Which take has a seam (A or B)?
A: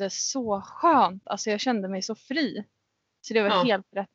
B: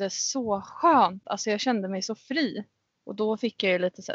B